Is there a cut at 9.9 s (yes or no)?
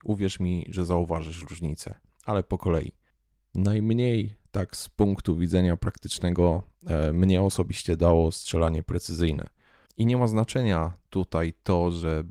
yes